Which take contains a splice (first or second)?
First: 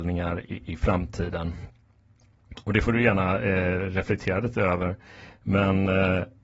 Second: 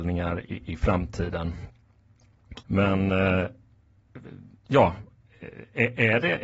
second